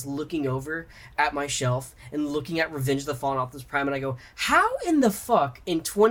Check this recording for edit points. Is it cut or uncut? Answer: uncut